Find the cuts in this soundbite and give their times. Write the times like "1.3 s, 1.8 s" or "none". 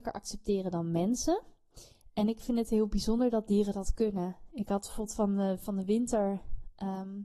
none